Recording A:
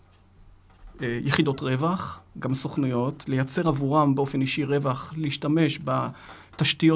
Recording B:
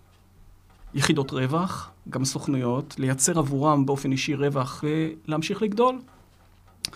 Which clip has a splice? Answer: B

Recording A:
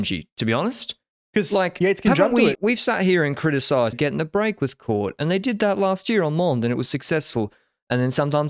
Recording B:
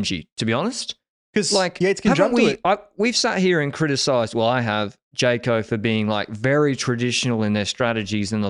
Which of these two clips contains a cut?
A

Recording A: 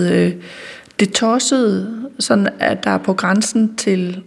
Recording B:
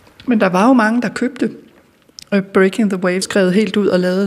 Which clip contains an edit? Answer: B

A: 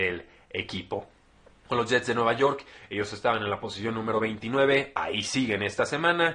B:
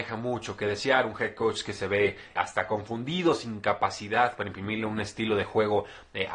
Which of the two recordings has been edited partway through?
B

